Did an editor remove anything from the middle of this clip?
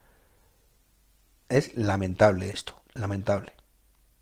yes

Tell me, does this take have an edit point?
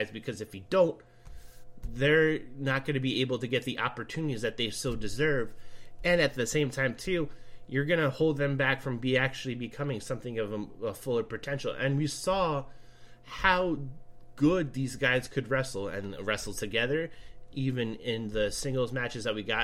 no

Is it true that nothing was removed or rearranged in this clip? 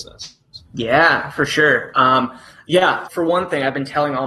no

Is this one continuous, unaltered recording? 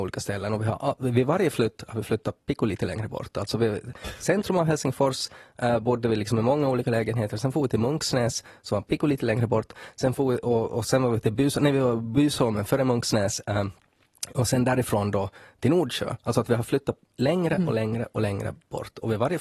yes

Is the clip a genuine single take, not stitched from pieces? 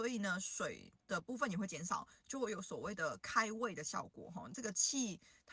yes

